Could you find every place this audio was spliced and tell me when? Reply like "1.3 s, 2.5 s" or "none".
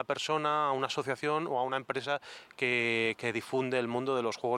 none